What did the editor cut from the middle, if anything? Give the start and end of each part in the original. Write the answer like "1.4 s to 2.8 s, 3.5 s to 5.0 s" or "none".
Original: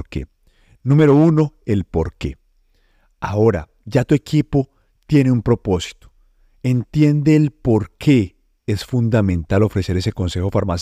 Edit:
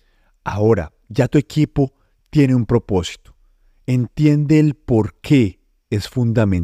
none